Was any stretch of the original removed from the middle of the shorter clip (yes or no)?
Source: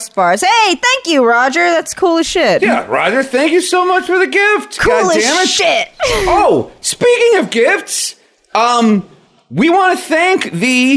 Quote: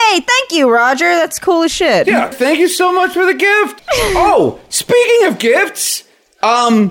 yes